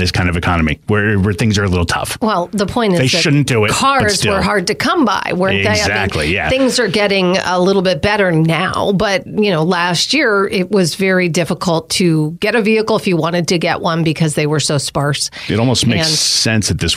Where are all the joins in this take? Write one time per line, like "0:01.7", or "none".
none